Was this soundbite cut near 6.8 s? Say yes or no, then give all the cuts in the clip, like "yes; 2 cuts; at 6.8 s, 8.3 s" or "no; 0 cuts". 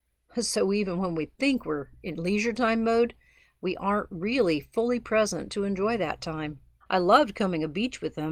yes; 1 cut; at 6.8 s